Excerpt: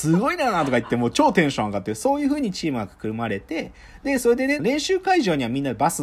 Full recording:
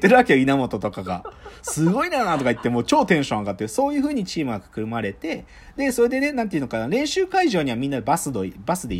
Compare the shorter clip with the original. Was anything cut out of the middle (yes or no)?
yes